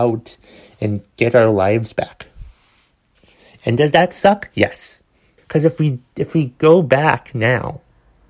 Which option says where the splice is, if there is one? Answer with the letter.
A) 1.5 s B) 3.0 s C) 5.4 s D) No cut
C